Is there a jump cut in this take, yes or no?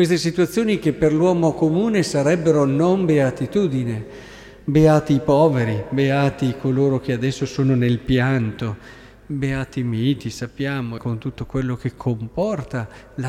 yes